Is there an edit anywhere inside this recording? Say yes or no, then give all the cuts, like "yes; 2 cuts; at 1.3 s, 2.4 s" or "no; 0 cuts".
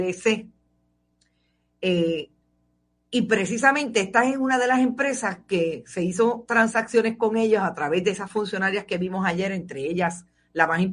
no; 0 cuts